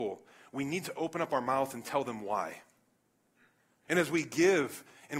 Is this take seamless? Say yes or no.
no